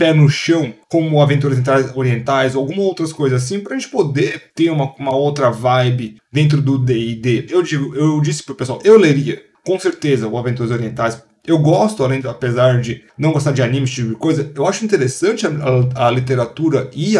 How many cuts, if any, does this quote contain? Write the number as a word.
one